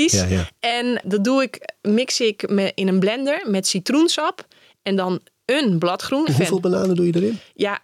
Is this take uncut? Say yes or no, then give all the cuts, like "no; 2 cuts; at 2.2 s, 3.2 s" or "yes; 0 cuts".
no; 2 cuts; at 1.0 s, 6.3 s